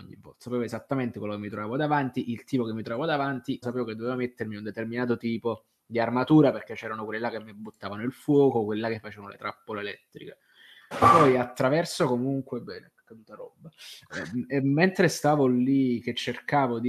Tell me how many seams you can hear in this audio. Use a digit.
3